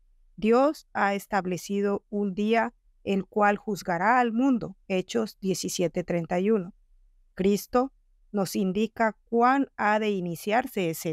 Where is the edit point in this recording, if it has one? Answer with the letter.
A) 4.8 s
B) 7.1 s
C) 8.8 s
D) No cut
A